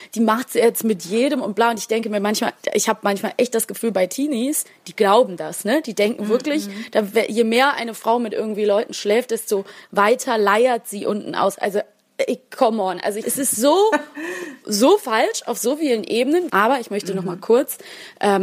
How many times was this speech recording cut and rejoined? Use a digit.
2